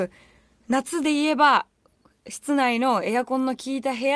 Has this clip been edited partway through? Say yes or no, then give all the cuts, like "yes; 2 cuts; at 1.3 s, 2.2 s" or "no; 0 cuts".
no; 0 cuts